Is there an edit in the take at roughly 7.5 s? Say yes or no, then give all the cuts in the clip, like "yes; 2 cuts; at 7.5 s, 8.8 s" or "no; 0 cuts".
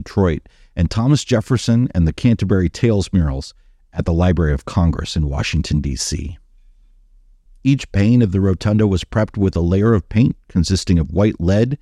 yes; 1 cut; at 7.5 s